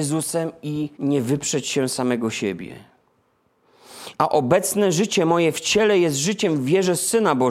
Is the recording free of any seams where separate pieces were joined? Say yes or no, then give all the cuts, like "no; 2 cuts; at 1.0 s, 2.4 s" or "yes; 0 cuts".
no; 2 cuts; at 0.9 s, 4.1 s